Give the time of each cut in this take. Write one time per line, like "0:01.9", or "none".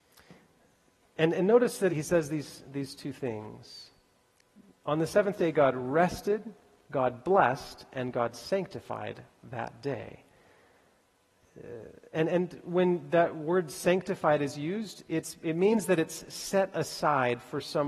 0:01.9